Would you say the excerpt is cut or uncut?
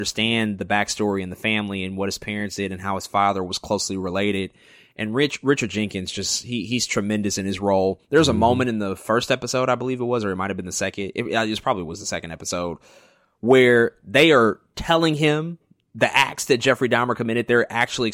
uncut